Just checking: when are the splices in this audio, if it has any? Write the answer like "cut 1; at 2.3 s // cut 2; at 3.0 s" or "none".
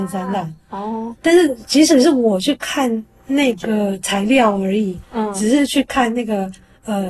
none